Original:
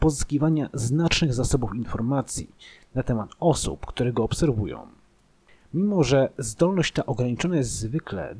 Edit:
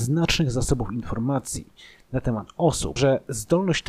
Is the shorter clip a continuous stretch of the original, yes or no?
no